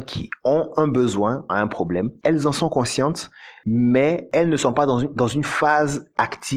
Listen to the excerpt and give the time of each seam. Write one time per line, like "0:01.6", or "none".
0:01.5

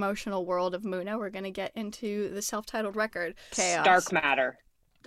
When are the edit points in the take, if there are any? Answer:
0:03.5

